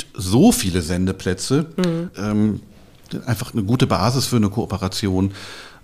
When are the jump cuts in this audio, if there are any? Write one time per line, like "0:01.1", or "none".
0:02.1